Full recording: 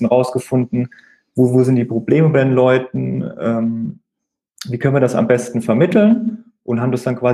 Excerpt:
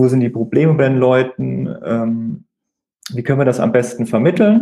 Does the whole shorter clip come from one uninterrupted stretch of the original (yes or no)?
yes